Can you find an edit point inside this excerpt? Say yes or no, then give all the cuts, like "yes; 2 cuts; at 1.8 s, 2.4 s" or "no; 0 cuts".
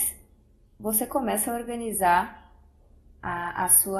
no; 0 cuts